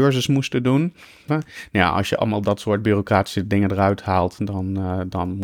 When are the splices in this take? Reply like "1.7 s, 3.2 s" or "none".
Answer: 1.3 s